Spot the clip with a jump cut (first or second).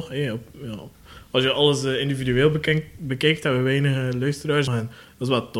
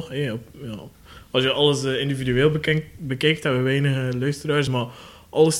first